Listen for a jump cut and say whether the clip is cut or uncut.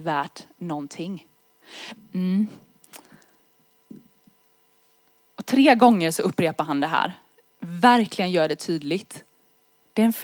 cut